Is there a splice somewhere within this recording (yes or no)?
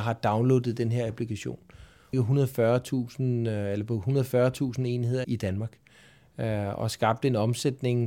yes